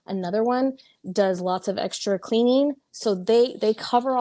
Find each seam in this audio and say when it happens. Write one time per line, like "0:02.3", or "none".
none